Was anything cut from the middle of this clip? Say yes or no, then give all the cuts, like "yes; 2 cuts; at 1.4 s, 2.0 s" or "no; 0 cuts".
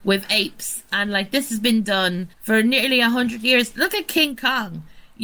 yes; 1 cut; at 2.3 s